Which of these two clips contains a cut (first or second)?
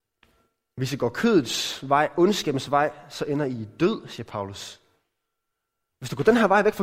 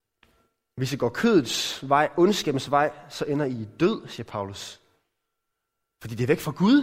first